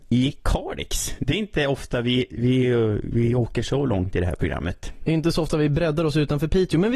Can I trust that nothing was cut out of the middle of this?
yes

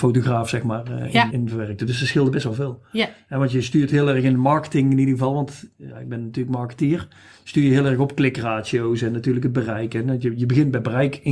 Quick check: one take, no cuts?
no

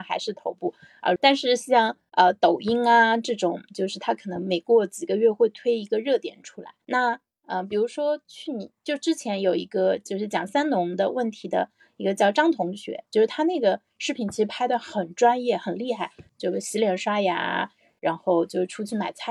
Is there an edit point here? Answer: yes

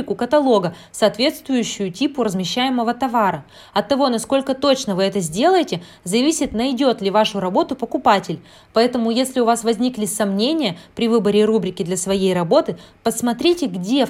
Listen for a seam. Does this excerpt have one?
no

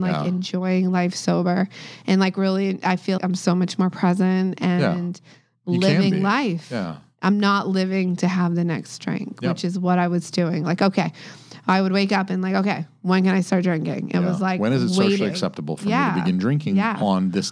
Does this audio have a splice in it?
yes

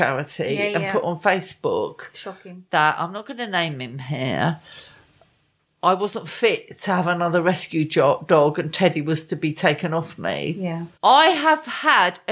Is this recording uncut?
no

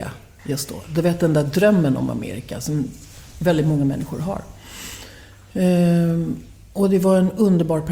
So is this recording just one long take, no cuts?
yes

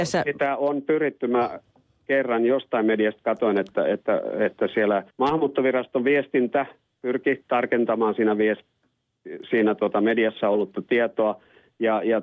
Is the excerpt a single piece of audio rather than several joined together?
no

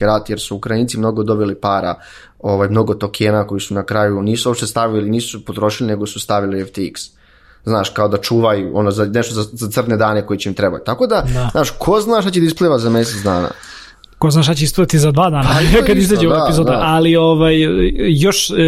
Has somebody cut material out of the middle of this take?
no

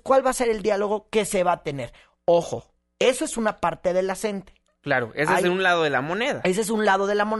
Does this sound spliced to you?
no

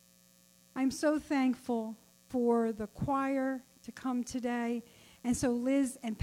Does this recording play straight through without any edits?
yes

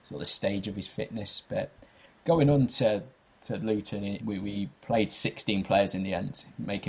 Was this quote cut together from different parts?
yes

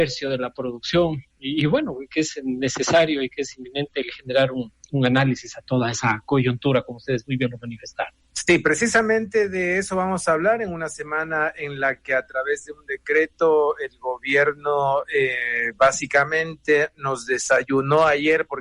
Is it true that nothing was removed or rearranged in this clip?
yes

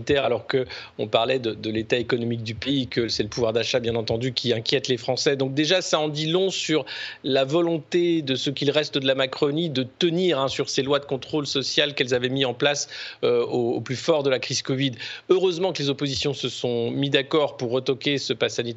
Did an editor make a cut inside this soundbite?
no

